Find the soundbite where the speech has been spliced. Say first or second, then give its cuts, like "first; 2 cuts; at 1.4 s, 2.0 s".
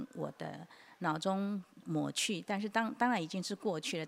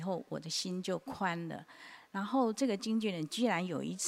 first; 1 cut; at 1.8 s